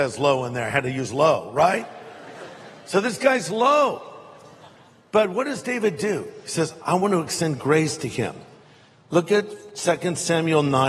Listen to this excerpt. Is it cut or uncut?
cut